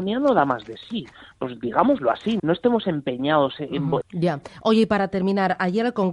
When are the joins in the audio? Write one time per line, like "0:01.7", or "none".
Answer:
0:02.4
0:04.0